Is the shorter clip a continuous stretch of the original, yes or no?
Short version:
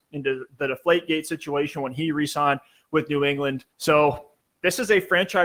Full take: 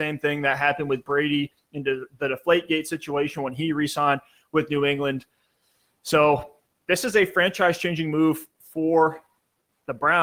no